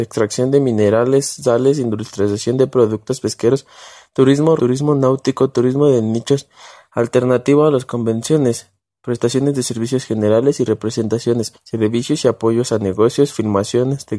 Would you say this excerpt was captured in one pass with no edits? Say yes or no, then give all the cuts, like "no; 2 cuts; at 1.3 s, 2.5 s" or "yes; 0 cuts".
no; 2 cuts; at 4.6 s, 11.5 s